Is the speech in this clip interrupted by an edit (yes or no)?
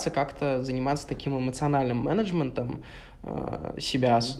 no